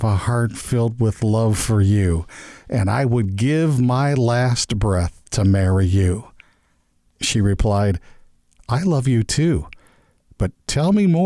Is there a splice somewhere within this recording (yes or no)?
no